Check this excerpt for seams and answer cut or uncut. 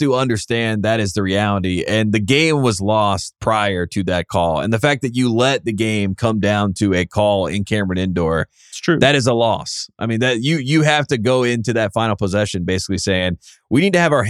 uncut